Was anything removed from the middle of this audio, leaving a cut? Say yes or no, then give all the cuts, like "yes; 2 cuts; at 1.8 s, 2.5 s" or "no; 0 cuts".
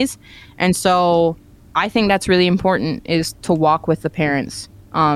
yes; 1 cut; at 3.3 s